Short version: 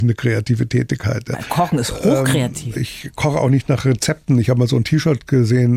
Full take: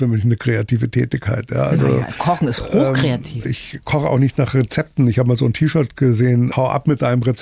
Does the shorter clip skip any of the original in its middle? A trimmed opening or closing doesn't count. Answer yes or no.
yes